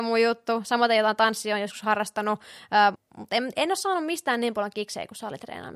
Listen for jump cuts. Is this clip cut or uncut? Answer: cut